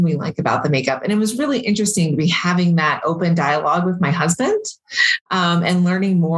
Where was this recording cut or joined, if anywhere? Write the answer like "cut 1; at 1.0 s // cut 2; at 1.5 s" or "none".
none